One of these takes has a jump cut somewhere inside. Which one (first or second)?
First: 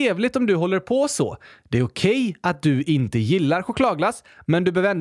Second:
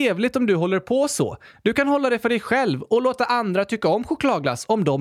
second